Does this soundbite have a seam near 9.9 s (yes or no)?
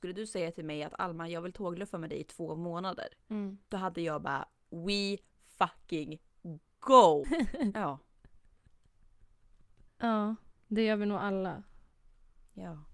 yes